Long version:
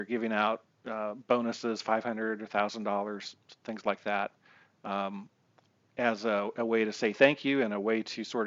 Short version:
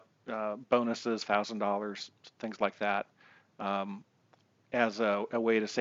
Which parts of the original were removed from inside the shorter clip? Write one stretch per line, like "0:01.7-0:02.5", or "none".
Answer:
0:01.8-0:02.5